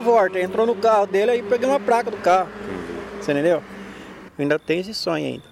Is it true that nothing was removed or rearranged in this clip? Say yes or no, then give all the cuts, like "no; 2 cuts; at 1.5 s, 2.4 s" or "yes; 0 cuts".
no; 1 cut; at 4.3 s